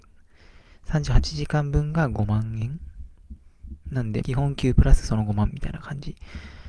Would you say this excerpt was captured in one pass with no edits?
no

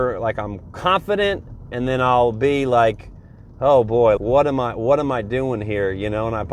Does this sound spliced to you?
yes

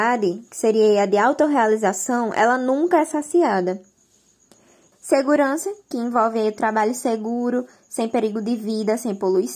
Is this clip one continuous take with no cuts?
no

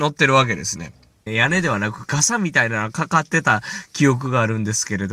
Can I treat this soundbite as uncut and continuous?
no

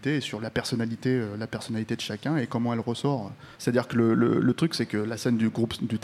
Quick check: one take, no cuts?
no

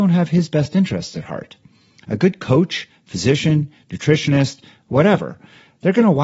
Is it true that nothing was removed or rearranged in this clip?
yes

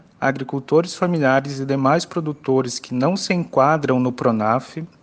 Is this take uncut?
yes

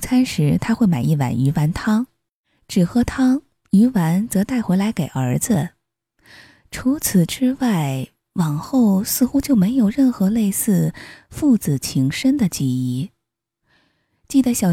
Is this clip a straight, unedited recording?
yes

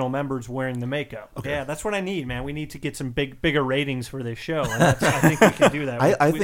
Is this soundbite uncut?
no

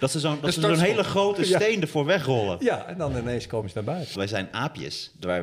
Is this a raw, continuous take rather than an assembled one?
no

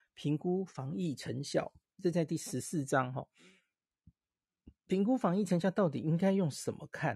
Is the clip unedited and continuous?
yes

